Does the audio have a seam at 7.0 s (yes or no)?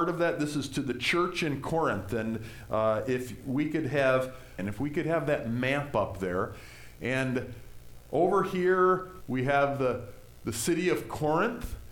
no